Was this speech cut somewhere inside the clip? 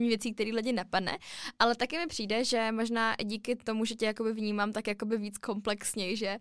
no; 0 cuts

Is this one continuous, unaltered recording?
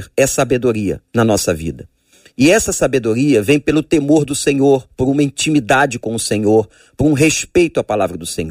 no; 1 cut; at 1.1 s

